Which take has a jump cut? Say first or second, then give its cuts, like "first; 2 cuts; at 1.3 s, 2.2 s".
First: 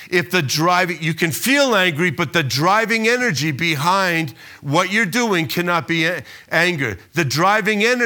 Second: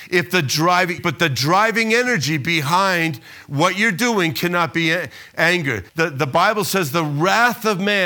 second; 2 cuts; at 1.0 s, 5.9 s